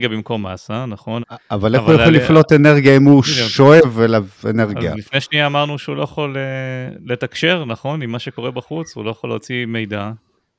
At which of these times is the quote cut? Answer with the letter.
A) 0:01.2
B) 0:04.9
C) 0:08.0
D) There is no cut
A